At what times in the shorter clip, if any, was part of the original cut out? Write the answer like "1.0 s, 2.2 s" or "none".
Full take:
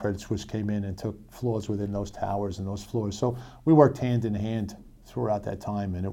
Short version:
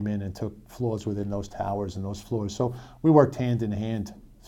none